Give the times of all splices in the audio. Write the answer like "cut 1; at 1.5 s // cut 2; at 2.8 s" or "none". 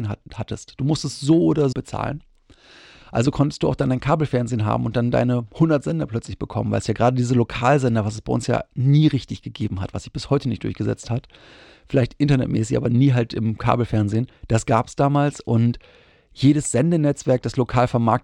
cut 1; at 1.7 s